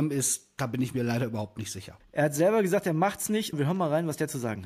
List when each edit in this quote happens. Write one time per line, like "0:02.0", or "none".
0:02.0
0:03.5

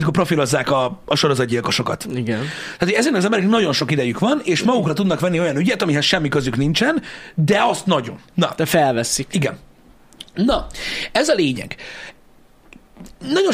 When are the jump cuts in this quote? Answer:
0:08.3

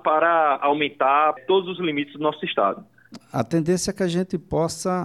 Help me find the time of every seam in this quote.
0:01.4

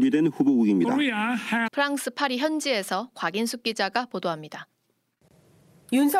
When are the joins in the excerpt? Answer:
0:01.7

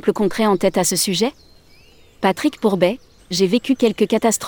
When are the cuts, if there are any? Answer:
0:03.2

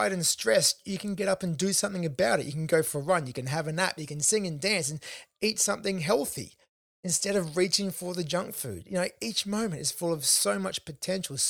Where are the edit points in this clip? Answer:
none

